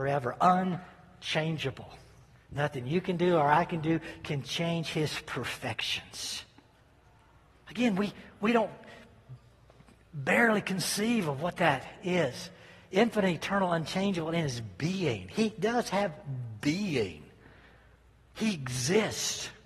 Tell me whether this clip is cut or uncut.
uncut